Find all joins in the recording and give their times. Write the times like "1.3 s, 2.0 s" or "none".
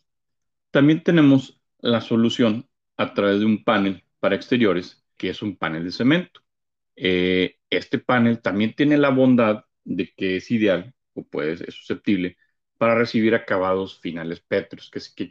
5.2 s, 6.8 s